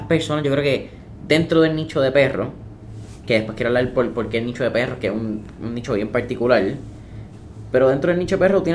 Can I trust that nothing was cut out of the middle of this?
yes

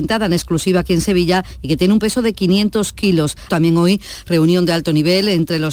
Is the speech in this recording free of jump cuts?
no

